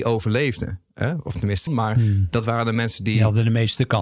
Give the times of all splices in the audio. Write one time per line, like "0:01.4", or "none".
0:01.7